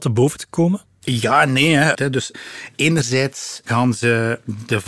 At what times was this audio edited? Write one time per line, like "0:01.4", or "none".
0:01.9